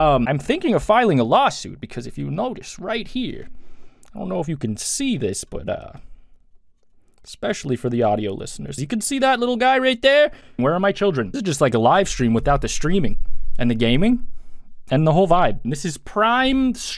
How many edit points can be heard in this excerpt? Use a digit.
3